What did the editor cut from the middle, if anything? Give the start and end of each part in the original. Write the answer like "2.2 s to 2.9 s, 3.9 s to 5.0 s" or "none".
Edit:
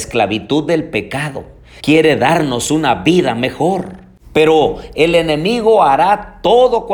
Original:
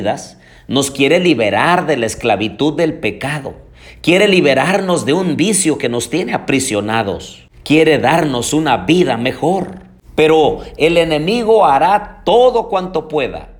3.9 s to 7.6 s